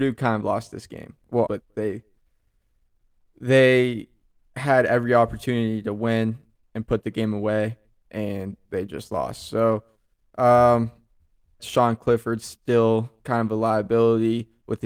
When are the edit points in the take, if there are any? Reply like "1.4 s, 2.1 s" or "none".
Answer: 1.5 s, 11.6 s

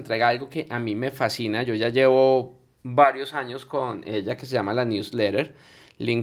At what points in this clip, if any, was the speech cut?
none

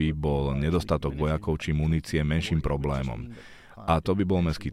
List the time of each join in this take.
none

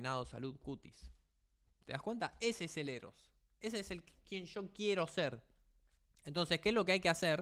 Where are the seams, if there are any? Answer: none

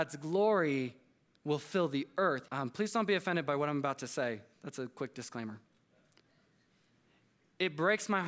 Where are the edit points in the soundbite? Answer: 2.5 s

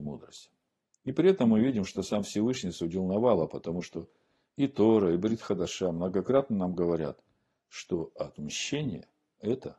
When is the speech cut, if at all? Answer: none

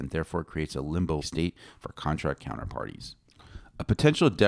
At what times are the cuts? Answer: 1.2 s

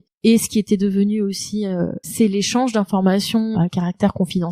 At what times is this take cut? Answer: 2.0 s, 3.5 s

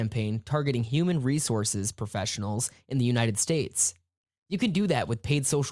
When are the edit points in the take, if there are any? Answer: none

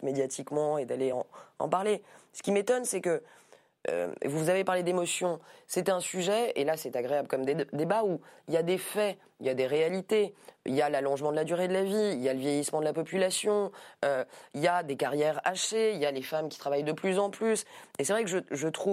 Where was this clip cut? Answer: none

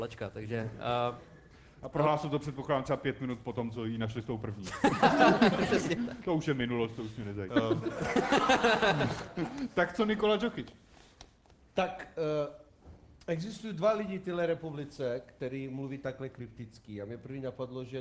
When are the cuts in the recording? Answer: 7.5 s

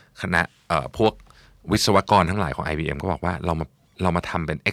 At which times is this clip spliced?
none

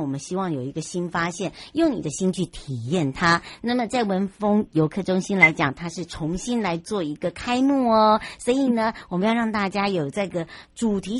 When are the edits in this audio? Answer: none

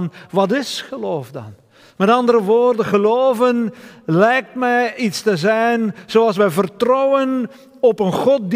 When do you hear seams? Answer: none

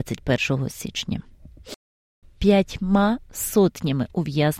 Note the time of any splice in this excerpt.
2.2 s

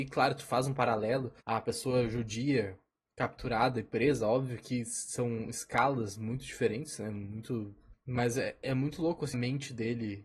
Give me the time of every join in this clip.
1.4 s, 7.9 s, 9.3 s

